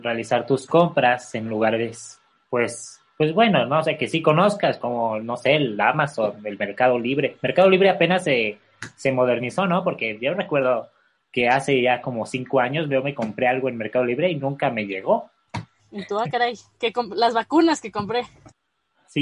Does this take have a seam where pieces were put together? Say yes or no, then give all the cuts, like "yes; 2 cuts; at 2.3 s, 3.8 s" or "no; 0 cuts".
yes; 1 cut; at 15.8 s